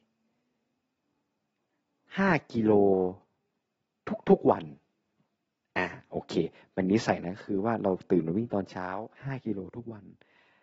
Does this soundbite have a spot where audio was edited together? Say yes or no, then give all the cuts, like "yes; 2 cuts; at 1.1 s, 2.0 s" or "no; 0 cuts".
yes; 1 cut; at 9.1 s